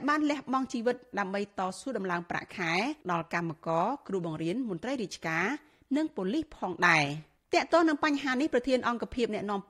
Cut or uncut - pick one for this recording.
cut